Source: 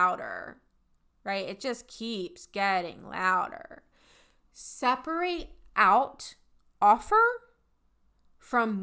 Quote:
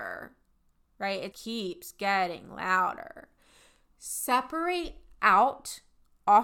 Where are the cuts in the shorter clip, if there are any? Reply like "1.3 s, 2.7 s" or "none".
1.3 s